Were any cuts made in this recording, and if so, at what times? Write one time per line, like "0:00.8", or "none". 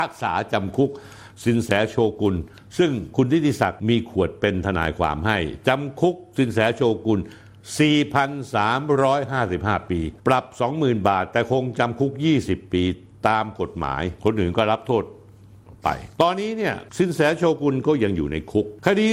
0:16.1